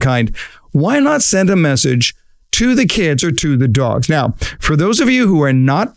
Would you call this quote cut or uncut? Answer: uncut